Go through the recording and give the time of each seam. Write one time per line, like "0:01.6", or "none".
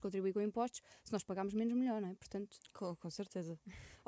none